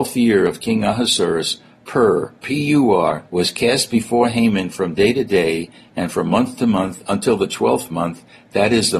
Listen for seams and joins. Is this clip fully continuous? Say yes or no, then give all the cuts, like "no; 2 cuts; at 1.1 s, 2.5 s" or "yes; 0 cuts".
no; 1 cut; at 3.3 s